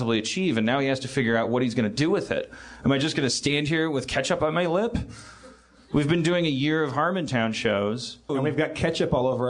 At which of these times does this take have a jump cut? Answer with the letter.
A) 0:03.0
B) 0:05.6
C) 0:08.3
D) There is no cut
C